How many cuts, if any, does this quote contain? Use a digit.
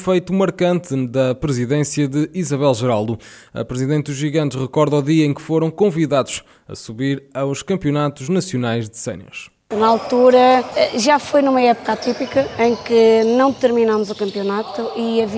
0